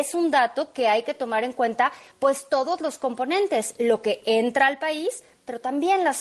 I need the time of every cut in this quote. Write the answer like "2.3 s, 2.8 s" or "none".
none